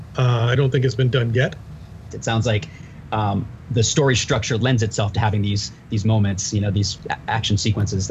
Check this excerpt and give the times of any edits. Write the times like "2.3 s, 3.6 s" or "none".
2.1 s